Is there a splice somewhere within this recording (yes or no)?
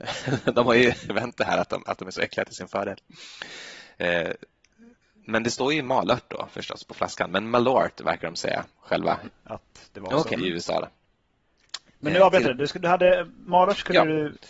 yes